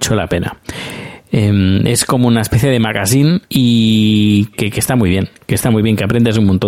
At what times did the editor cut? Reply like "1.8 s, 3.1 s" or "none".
3.5 s, 4.5 s